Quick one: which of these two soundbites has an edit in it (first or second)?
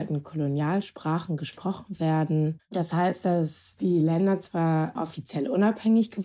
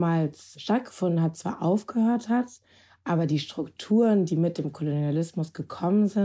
first